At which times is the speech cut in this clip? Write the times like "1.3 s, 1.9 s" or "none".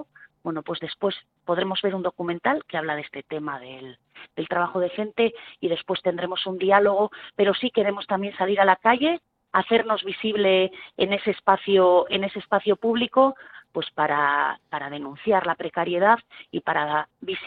none